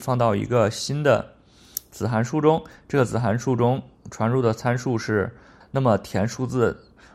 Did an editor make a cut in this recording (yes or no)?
yes